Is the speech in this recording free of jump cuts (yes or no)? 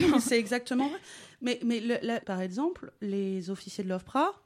no